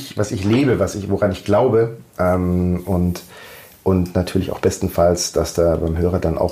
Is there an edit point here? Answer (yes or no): no